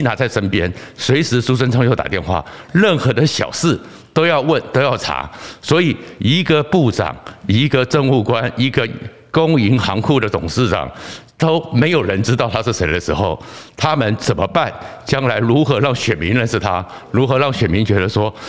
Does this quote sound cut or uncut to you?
uncut